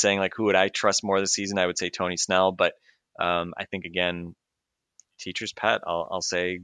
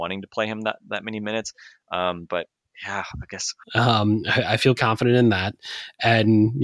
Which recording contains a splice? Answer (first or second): second